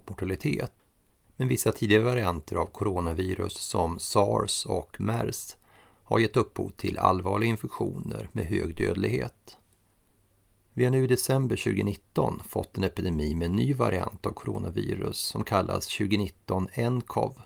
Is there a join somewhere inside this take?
no; 0 cuts

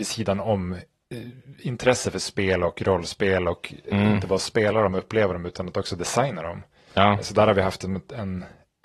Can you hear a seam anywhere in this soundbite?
no; 0 cuts

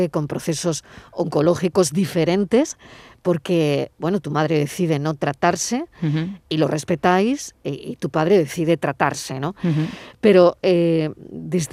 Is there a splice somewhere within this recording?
no; 0 cuts

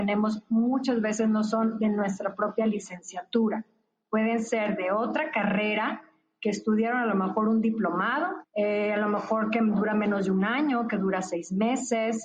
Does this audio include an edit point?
yes; 1 cut; at 8.4 s

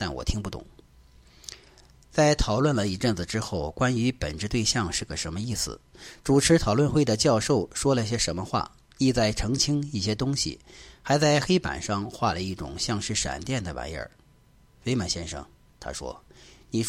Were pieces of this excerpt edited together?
no; 0 cuts

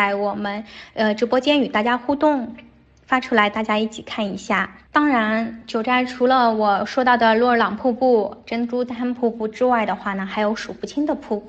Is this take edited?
no; 0 cuts

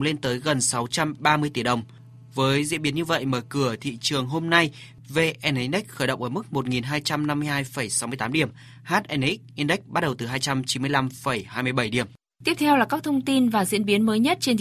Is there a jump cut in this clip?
no; 0 cuts

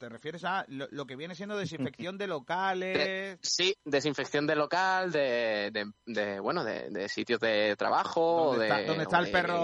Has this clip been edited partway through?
no; 0 cuts

